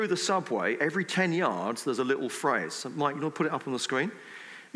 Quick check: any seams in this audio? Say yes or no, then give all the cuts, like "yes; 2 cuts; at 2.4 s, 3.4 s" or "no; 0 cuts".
no; 0 cuts